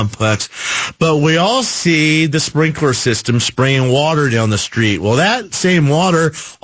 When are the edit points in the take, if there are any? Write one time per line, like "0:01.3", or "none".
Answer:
none

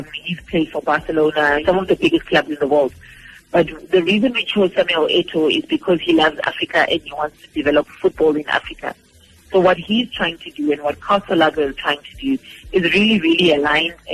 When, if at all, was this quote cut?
0:01.6

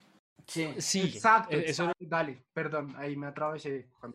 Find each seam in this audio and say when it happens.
0:01.9

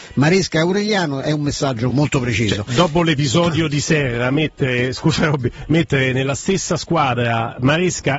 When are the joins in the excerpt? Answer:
0:01.9

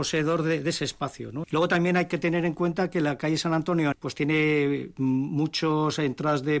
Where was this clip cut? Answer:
0:01.4
0:03.9

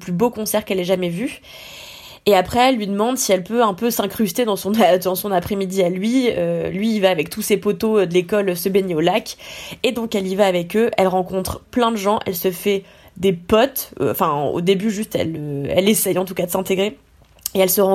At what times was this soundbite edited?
none

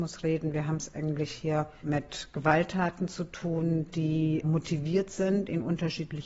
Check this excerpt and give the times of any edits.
none

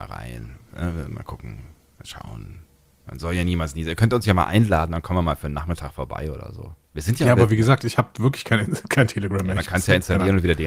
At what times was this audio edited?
0:06.8

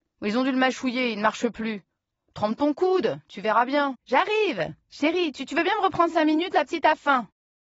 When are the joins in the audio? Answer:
0:03.9

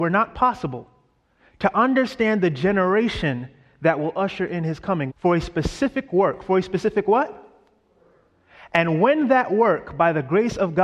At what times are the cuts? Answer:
0:05.1

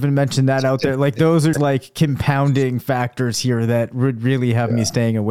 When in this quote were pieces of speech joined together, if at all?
0:01.5

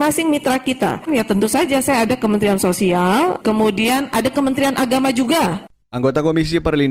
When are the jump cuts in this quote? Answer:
0:01.1
0:03.4

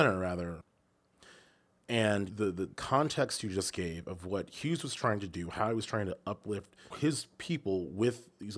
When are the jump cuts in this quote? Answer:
0:06.9

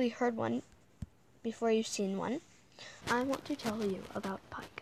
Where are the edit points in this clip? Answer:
0:03.0

